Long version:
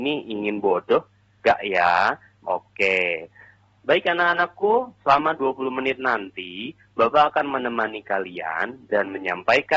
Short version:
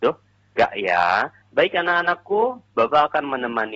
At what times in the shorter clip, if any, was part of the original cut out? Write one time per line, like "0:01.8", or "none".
0:01.4
0:02.7

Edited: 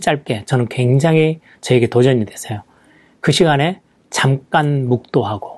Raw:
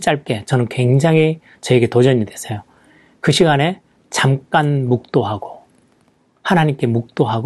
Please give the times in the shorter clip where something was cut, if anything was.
none

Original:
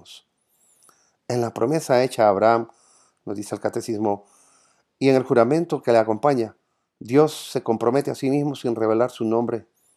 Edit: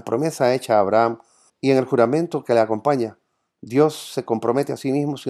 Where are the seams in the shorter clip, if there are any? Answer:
0:01.5

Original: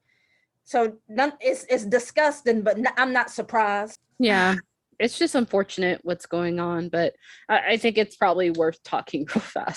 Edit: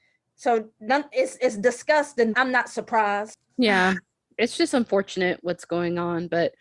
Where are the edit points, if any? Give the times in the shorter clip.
0:02.3

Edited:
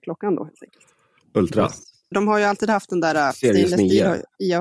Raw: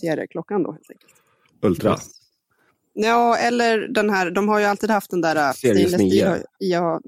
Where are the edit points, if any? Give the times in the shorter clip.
0:02.1

